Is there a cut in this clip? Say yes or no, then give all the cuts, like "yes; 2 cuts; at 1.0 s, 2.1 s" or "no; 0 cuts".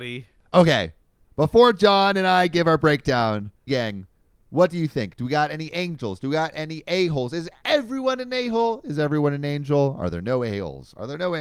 yes; 1 cut; at 3.7 s